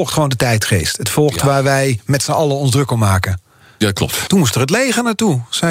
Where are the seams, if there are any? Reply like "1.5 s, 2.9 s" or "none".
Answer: 4.3 s